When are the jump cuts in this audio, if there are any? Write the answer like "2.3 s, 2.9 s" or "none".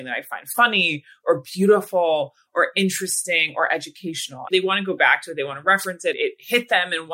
4.5 s